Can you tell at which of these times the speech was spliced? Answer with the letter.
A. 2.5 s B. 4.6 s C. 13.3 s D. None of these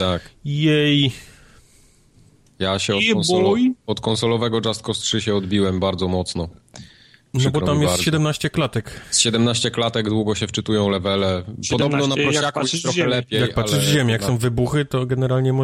D